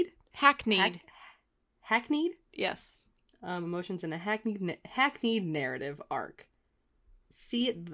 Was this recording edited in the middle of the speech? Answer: no; 0 cuts

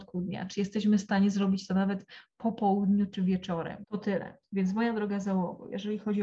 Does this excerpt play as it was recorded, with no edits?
no; 1 cut; at 3.8 s

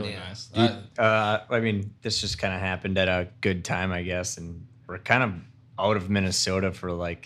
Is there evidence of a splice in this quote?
yes; 1 cut; at 1.0 s

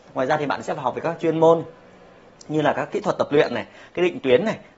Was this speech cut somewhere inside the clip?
no; 0 cuts

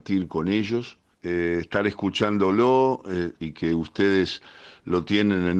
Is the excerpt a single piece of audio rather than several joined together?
no; 2 cuts; at 1.1 s, 3.4 s

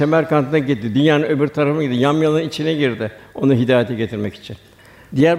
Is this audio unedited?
yes; 0 cuts

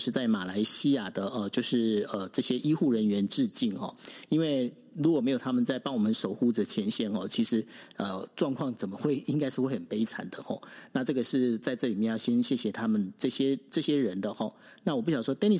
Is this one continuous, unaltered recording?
yes; 0 cuts

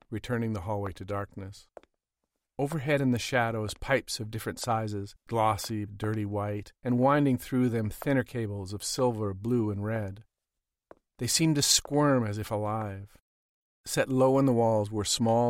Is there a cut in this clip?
yes; 2 cuts; at 5.9 s, 13.6 s

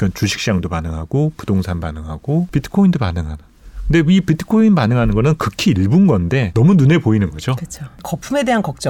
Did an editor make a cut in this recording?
no; 0 cuts

